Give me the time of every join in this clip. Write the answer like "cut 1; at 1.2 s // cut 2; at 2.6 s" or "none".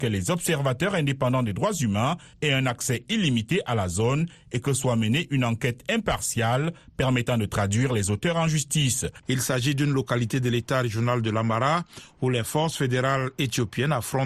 cut 1; at 9.2 s